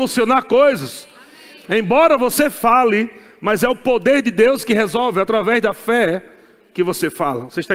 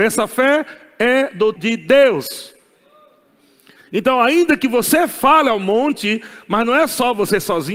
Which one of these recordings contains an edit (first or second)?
second